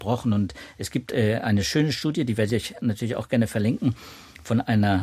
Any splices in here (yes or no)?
no